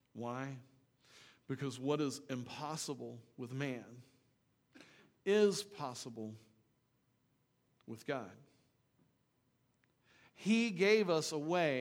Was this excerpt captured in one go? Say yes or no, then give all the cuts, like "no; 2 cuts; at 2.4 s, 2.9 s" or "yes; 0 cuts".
yes; 0 cuts